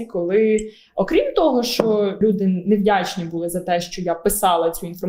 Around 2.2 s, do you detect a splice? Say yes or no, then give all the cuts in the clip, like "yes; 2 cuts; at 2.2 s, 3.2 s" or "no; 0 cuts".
yes; 1 cut; at 2.2 s